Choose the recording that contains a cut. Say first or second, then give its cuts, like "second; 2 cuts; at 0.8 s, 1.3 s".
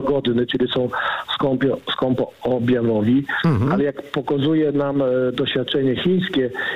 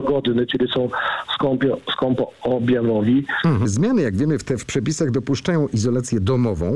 second; 1 cut; at 3.7 s